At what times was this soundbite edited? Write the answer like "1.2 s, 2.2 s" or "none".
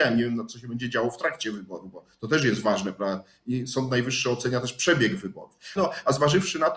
5.8 s